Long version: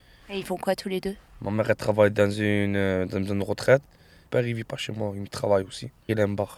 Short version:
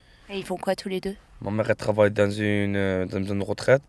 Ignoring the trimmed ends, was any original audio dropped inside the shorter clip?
no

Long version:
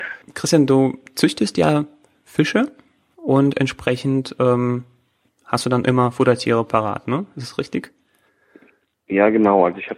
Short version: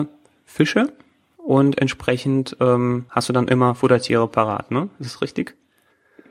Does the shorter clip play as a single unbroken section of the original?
no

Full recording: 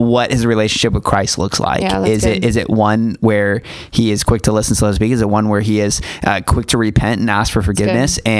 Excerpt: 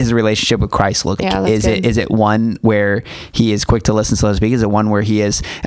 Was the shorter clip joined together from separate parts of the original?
yes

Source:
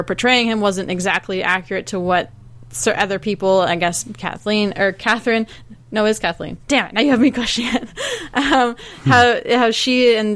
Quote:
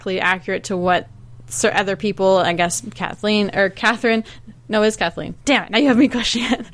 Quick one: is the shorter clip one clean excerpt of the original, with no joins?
yes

